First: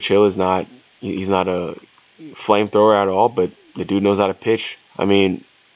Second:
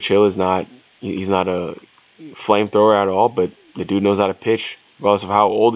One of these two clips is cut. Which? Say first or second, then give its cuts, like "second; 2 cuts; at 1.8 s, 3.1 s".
first; 1 cut; at 4.9 s